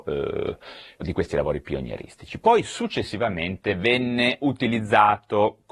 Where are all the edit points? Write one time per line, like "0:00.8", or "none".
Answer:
0:01.0